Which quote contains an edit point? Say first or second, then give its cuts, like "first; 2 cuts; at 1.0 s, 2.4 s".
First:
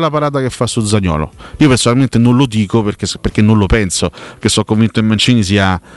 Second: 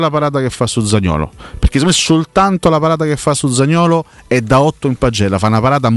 first; 1 cut; at 1.6 s